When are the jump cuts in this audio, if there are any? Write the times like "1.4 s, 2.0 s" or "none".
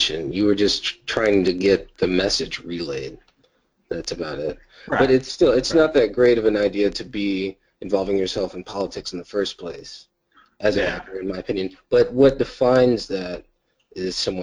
none